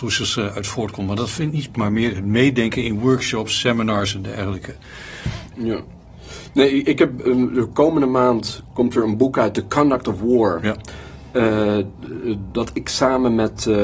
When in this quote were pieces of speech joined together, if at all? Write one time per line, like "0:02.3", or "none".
0:01.7
0:05.5